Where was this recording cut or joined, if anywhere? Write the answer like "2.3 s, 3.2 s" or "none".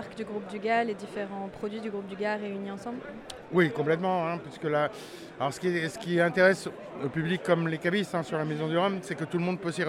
none